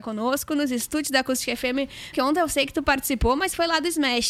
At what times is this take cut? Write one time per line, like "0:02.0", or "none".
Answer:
0:02.1